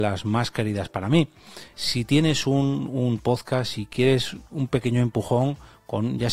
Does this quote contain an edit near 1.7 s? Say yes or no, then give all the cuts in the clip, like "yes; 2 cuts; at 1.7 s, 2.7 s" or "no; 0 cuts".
yes; 1 cut; at 1.7 s